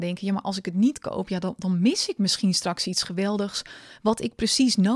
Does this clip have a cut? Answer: no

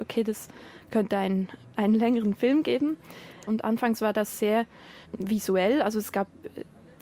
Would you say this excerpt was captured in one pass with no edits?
no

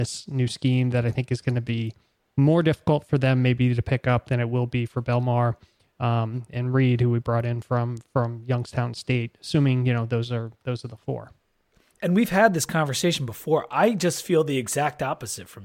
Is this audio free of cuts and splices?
yes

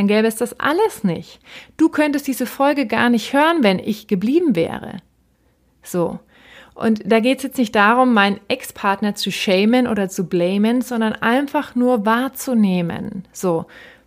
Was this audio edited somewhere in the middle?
no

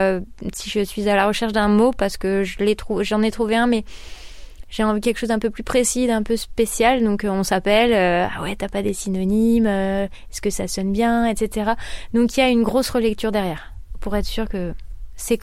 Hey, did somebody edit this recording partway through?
no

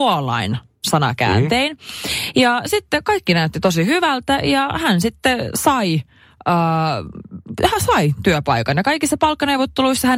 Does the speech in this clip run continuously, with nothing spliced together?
yes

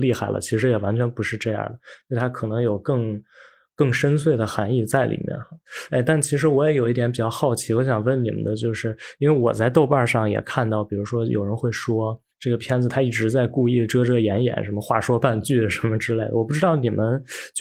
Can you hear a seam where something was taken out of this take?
no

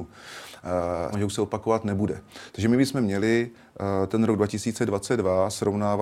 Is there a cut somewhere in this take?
yes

